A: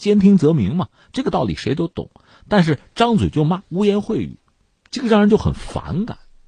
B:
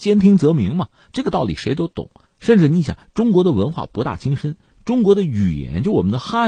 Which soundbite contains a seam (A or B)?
B